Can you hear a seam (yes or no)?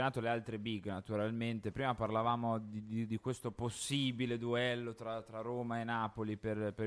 no